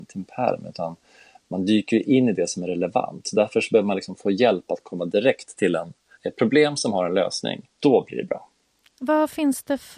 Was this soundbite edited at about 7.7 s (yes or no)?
yes